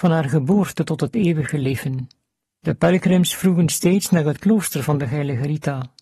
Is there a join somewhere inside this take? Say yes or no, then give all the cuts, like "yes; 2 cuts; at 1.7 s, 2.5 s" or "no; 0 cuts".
yes; 1 cut; at 2.6 s